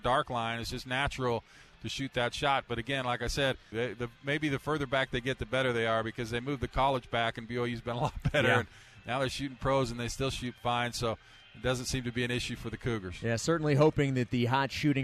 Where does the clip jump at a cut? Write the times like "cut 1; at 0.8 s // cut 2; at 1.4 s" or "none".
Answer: cut 1; at 3.7 s